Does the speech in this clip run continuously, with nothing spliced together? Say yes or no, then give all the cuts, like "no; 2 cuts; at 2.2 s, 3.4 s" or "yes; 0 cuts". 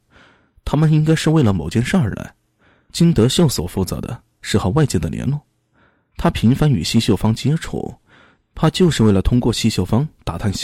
yes; 0 cuts